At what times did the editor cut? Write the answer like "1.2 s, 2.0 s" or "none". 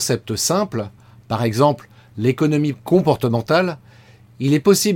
none